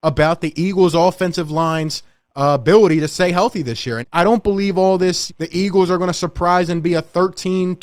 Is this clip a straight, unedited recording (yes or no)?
no